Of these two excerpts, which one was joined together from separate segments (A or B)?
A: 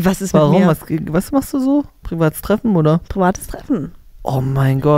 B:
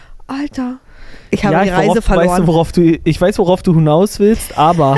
A